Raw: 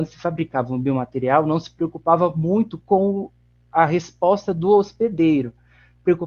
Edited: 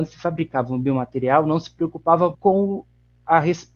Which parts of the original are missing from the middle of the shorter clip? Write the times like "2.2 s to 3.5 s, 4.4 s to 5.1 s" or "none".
2.3 s to 2.8 s